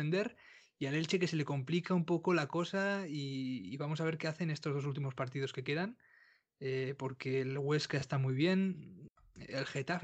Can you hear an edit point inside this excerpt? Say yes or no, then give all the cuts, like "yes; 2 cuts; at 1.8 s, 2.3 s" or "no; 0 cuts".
no; 0 cuts